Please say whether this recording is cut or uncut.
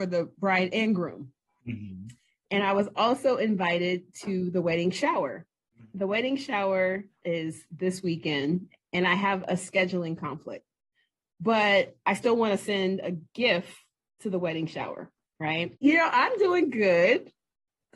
cut